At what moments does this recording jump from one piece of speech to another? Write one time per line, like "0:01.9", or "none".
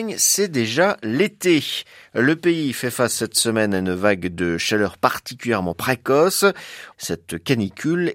0:06.9